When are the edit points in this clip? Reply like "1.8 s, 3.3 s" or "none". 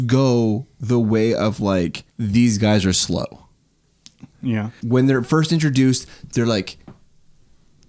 2.1 s, 4.8 s